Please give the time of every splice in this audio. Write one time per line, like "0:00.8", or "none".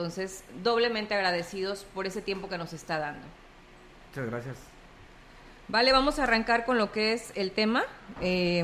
none